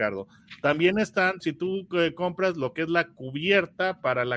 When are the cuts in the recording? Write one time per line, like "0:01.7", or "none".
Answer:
0:01.4